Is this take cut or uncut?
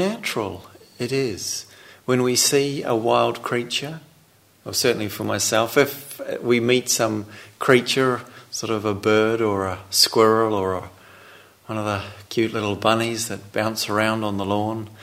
uncut